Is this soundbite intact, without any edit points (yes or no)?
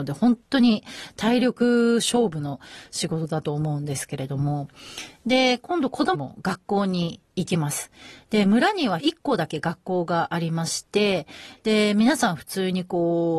no